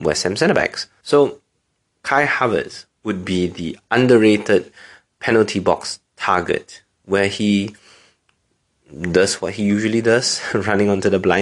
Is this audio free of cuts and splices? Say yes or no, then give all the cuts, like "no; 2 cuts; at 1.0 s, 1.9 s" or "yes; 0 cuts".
no; 1 cut; at 1.0 s